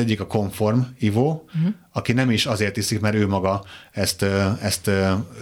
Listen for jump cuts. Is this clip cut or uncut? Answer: uncut